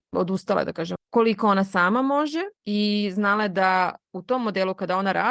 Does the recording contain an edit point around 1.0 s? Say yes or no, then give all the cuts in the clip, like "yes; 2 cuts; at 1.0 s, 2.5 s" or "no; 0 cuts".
yes; 2 cuts; at 1.0 s, 2.6 s